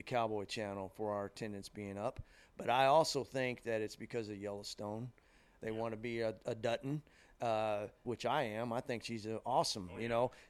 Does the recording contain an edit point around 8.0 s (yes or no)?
yes